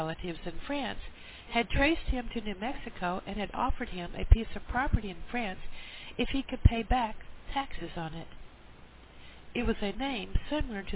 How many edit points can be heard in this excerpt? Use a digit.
1